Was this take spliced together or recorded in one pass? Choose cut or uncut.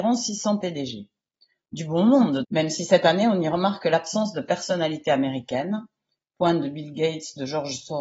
cut